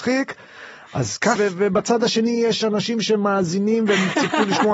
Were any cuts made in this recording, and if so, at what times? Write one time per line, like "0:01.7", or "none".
0:01.3